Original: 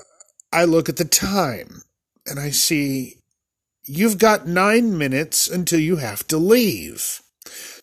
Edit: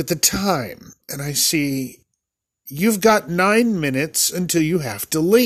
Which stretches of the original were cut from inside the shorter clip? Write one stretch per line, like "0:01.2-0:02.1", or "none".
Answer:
0:01.9-0:02.2